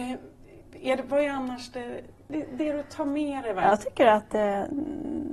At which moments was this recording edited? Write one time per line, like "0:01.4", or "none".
0:01.1